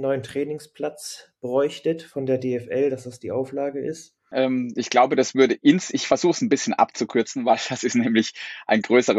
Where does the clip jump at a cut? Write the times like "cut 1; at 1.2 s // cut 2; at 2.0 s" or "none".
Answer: cut 1; at 4.3 s